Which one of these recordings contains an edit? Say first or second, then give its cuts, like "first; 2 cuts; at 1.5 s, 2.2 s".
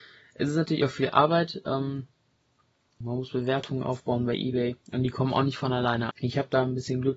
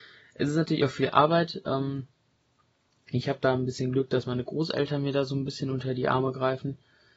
first; 3 cuts; at 3.0 s, 4.8 s, 6.1 s